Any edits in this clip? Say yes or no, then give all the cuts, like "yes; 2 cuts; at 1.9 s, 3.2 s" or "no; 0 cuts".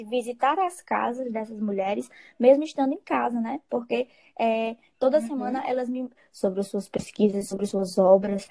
yes; 1 cut; at 6.2 s